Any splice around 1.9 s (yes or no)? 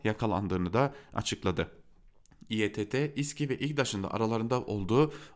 no